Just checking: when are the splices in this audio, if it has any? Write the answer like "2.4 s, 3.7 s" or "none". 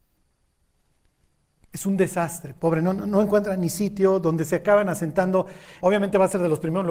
2.6 s, 5.8 s